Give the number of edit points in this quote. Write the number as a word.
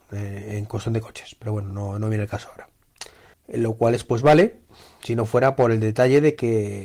one